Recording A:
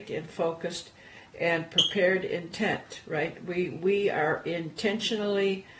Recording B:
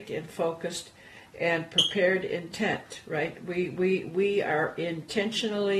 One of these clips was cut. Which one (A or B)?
A